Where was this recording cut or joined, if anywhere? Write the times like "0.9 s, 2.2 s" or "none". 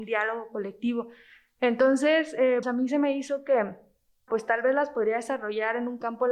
2.6 s, 4.3 s